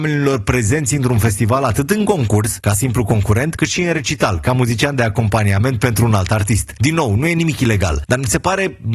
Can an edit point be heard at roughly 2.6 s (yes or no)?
no